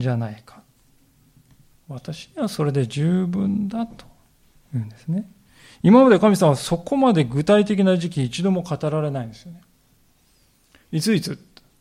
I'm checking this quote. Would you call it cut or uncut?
uncut